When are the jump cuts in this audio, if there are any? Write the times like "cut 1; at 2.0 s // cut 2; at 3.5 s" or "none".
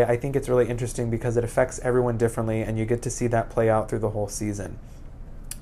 none